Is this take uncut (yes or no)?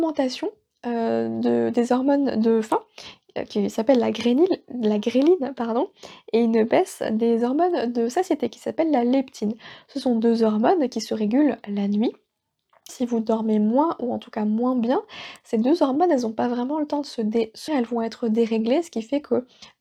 no